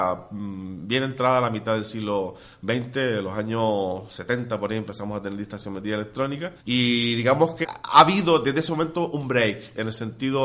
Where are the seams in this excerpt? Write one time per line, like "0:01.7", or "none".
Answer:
0:06.6
0:07.6